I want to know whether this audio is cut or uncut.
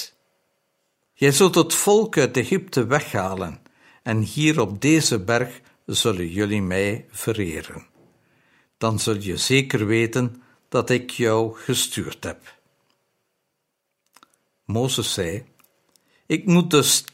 cut